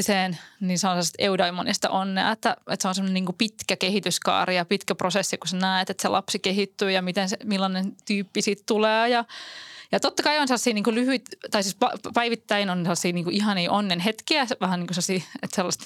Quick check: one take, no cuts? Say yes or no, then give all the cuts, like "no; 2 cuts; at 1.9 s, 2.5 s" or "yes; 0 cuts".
yes; 0 cuts